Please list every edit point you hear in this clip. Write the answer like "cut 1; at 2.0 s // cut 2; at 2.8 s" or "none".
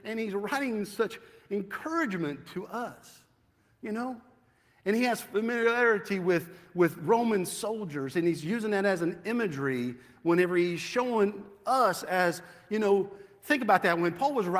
none